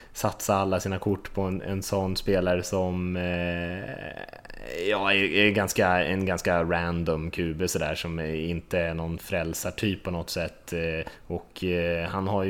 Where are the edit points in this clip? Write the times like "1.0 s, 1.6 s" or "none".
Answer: none